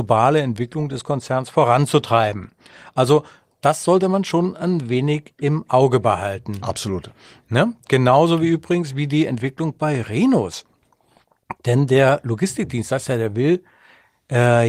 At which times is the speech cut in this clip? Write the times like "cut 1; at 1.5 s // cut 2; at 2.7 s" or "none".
none